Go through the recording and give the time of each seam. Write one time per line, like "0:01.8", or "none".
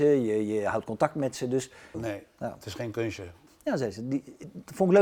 0:01.9
0:03.5